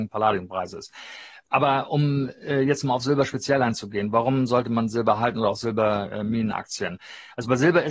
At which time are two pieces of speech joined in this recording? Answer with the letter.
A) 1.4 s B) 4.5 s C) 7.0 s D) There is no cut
D